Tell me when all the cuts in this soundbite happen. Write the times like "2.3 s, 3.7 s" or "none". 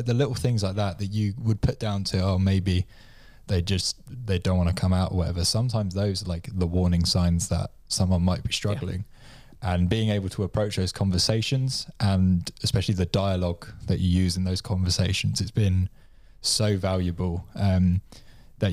none